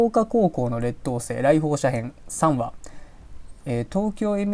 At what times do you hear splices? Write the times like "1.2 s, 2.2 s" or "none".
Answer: 3.6 s

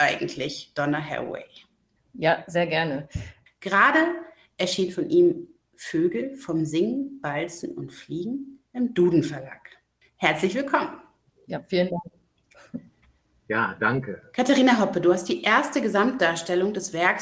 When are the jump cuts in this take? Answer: 3.5 s

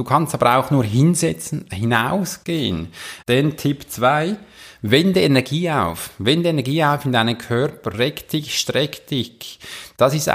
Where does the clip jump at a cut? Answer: 3.2 s, 7.9 s

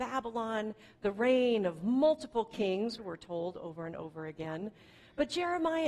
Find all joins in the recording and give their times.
3.0 s

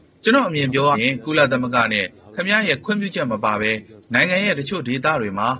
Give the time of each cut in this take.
0.9 s

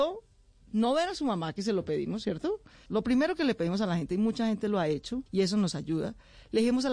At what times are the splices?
2.9 s, 5.3 s

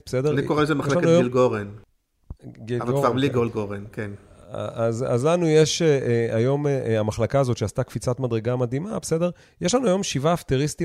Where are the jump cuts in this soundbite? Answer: none

